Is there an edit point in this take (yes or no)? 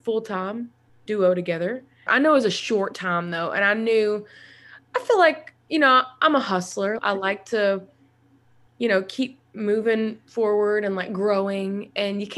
yes